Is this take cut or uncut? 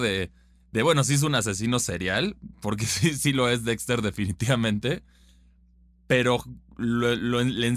uncut